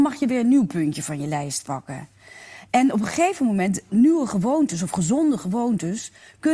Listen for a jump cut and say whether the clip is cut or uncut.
cut